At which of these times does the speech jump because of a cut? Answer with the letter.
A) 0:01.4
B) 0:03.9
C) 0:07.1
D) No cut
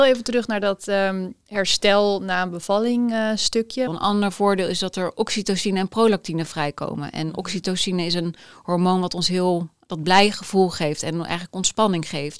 B